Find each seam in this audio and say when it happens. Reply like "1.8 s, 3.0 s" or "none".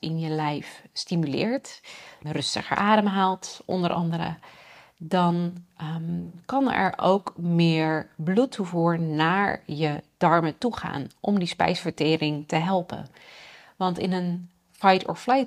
2.2 s